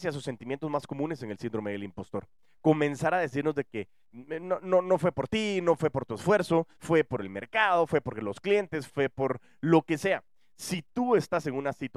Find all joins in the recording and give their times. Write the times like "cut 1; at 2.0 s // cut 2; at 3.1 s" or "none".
cut 1; at 6.8 s // cut 2; at 8.9 s